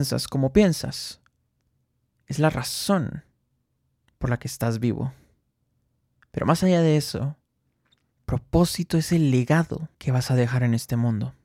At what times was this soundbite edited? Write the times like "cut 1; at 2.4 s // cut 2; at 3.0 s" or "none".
cut 1; at 8.1 s // cut 2; at 9.9 s